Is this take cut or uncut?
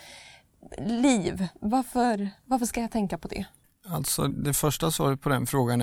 cut